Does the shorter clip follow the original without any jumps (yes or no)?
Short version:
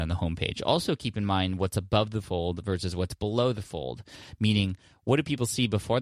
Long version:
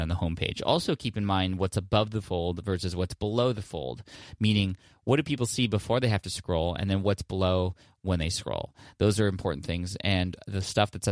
yes